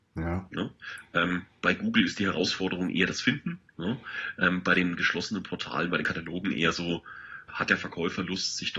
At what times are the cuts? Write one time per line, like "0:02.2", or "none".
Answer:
0:07.5